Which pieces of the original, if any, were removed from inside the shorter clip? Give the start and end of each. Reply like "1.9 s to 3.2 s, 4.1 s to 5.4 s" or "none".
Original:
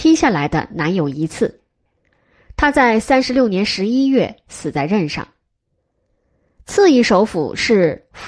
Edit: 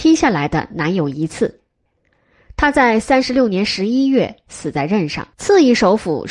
5.3 s to 6.6 s